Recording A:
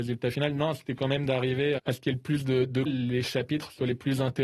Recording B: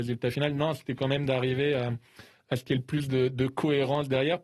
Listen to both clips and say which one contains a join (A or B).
A